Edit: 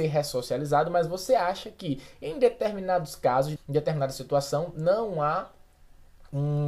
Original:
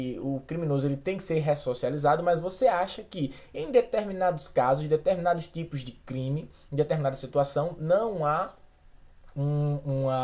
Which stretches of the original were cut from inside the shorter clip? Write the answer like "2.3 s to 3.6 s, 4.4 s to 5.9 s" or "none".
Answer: 4.9 s to 6.6 s